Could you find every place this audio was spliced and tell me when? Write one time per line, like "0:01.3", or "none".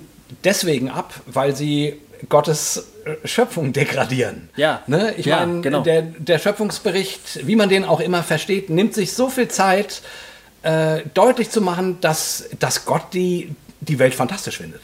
none